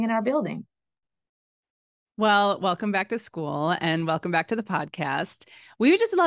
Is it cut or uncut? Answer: uncut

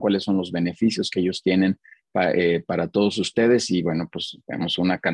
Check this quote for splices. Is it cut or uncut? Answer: uncut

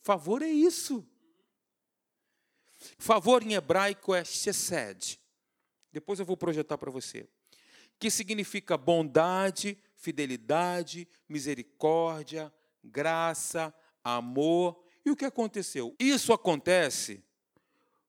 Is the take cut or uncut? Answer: cut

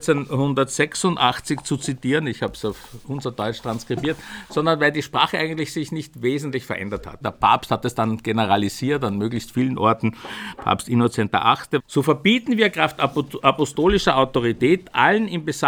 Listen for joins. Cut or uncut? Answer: cut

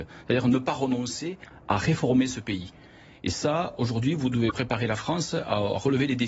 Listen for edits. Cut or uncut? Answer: uncut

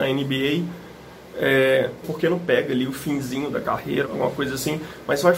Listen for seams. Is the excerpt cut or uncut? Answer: cut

